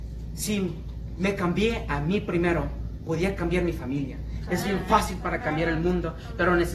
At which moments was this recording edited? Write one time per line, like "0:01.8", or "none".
0:04.5